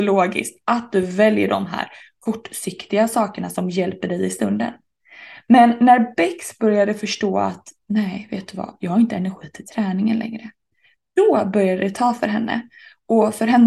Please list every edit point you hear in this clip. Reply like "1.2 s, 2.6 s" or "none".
none